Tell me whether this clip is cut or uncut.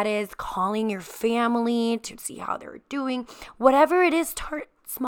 uncut